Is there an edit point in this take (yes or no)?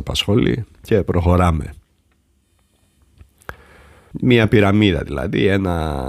yes